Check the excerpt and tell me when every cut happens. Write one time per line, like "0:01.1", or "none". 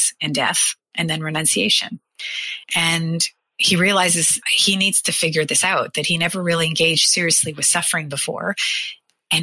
0:02.6